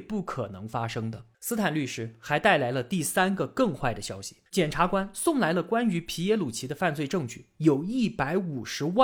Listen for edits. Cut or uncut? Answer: cut